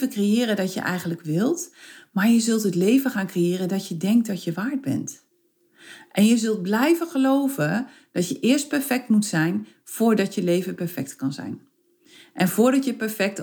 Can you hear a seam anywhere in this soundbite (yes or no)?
no